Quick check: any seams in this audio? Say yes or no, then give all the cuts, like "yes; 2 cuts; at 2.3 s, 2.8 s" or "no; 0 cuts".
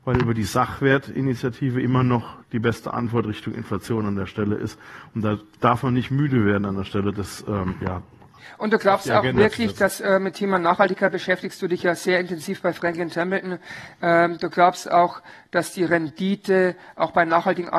no; 0 cuts